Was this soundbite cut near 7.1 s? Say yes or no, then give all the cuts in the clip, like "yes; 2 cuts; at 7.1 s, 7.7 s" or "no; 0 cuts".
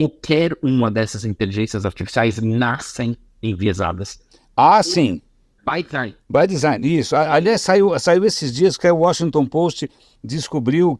no; 1 cut; at 5.6 s